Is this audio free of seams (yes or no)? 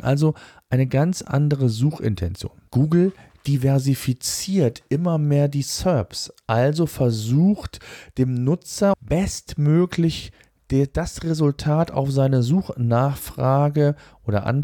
no